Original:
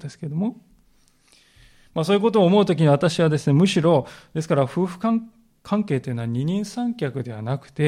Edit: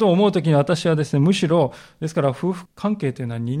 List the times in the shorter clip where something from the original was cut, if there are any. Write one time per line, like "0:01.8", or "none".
0:02.6